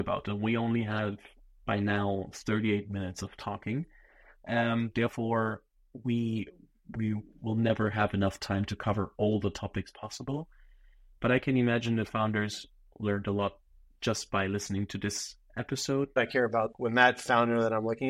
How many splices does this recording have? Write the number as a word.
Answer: one